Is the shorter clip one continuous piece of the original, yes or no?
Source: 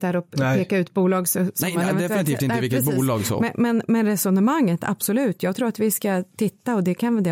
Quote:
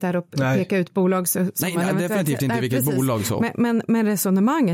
yes